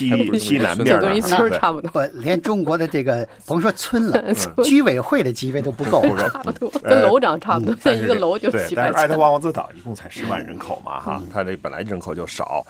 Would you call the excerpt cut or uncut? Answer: cut